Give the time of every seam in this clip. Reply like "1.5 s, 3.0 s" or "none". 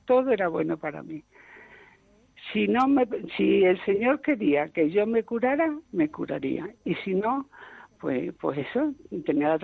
none